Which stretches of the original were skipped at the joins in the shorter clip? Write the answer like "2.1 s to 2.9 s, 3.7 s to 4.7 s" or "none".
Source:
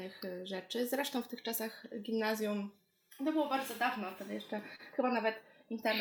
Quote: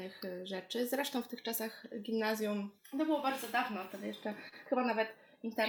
2.8 s to 3.1 s